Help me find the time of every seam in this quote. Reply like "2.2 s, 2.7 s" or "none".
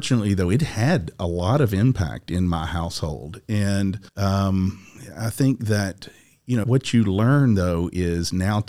4.1 s, 6.6 s